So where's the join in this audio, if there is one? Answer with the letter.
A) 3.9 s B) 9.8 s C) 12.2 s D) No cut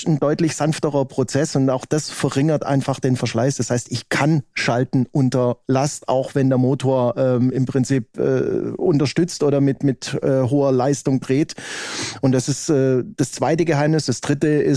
D